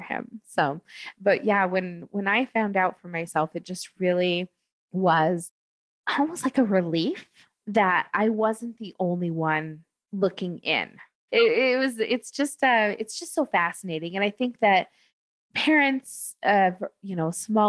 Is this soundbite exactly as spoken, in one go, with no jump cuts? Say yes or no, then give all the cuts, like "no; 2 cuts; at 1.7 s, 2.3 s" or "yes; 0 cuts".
no; 1 cut; at 11.3 s